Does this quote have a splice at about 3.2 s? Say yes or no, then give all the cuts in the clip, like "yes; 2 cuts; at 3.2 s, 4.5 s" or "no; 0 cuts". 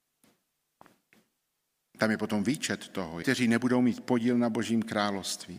yes; 1 cut; at 3.2 s